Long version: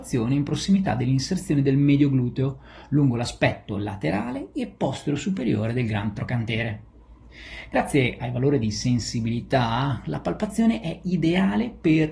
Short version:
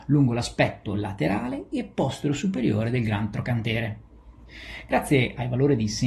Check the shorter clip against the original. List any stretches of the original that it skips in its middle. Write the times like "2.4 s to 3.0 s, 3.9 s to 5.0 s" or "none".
none